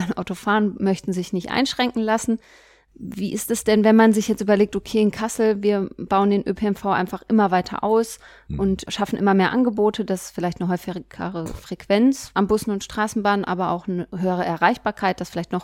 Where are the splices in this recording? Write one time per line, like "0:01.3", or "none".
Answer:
none